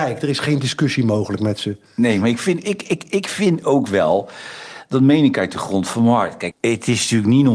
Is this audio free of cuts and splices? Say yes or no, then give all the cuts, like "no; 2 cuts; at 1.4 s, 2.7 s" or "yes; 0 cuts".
no; 1 cut; at 6.5 s